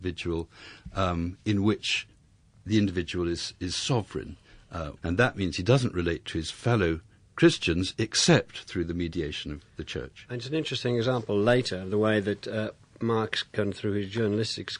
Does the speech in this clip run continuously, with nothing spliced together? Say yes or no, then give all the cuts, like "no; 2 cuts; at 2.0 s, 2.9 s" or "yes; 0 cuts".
no; 1 cut; at 5.0 s